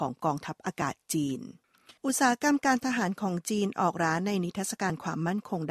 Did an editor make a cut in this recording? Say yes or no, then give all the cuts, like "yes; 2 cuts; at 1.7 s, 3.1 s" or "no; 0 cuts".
yes; 1 cut; at 2.0 s